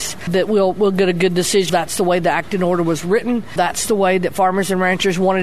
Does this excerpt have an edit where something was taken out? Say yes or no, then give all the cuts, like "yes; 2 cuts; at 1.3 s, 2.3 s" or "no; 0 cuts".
yes; 1 cut; at 1.7 s